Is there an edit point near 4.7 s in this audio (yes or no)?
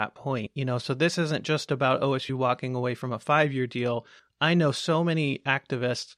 no